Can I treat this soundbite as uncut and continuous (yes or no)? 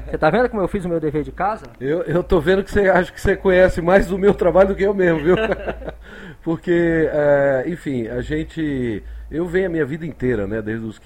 yes